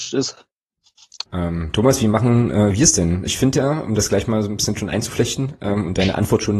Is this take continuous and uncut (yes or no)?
no